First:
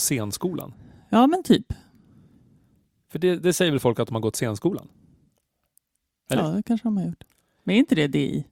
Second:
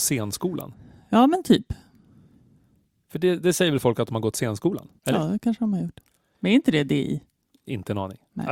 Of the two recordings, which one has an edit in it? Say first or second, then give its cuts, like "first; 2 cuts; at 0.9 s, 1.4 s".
second; 1 cut; at 5.0 s